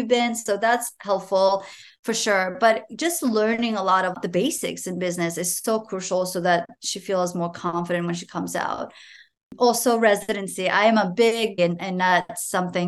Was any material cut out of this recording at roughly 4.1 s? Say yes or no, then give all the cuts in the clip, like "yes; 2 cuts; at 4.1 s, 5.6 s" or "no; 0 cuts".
yes; 2 cuts; at 4.1 s, 11.6 s